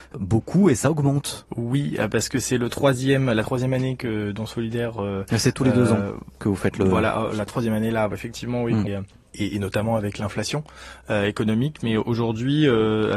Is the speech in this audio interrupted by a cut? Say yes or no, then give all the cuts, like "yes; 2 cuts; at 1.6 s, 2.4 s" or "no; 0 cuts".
yes; 1 cut; at 8.9 s